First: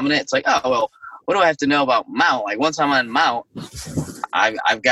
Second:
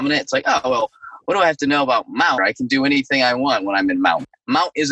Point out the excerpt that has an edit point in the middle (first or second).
second